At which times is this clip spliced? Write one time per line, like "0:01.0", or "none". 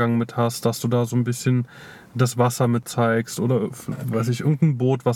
none